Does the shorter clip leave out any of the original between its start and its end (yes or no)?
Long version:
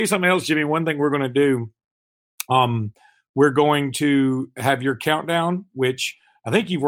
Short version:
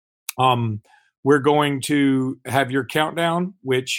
no